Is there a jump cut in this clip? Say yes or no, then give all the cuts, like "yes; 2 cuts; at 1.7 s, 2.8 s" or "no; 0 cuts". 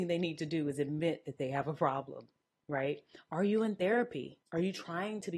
yes; 1 cut; at 4.4 s